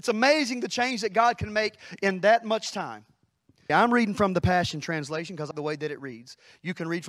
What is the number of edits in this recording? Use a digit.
2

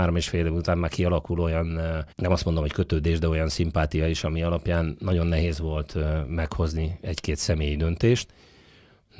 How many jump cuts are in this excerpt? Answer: 1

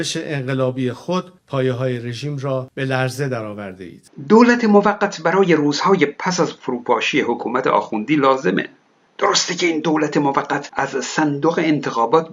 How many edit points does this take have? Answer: 0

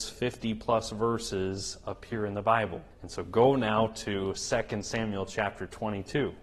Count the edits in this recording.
1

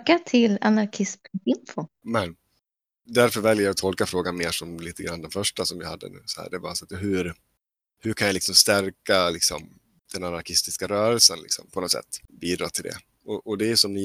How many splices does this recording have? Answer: 1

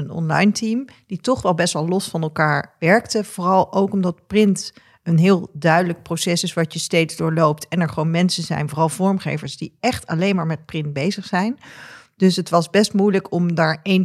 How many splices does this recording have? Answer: 0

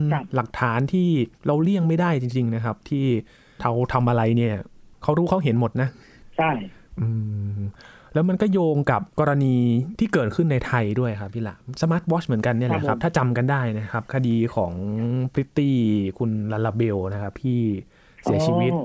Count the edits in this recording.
1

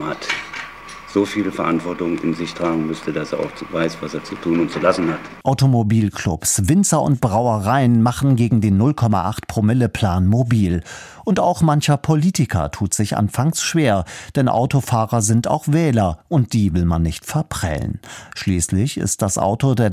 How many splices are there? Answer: 1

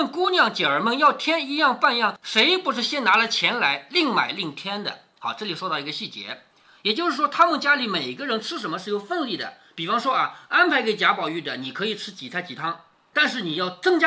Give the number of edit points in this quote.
0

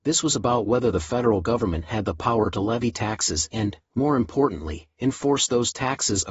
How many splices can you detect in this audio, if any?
0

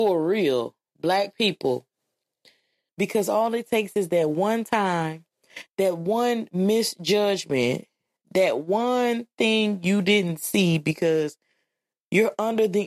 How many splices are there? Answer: 1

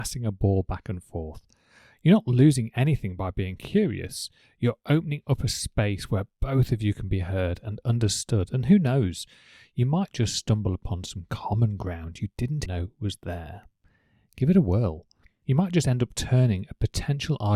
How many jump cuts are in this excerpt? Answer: 2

